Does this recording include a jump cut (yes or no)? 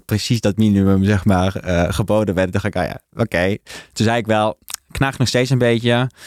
no